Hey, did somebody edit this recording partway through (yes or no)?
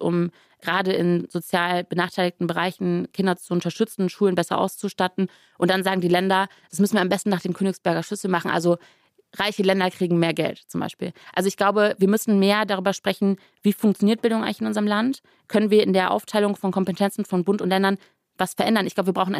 no